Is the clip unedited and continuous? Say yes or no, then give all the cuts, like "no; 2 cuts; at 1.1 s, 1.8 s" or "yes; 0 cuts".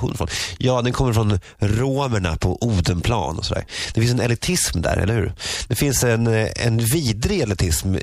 yes; 0 cuts